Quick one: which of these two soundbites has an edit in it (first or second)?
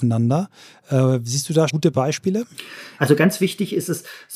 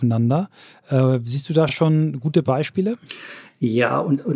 first